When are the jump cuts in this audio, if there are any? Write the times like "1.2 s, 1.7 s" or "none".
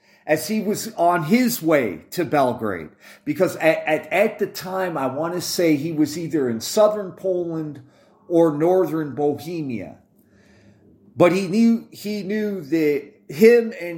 none